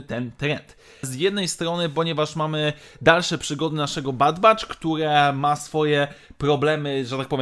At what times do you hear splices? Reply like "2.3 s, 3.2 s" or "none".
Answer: 1.0 s